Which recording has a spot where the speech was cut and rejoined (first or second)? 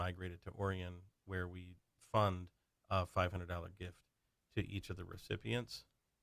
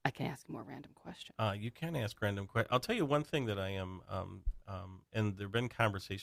second